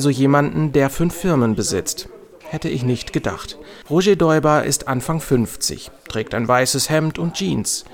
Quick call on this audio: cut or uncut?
cut